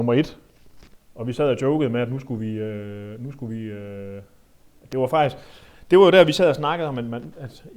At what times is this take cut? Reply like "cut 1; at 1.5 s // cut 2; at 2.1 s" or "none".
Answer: none